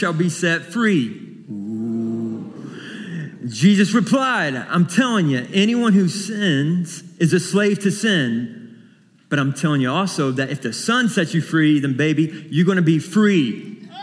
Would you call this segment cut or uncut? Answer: uncut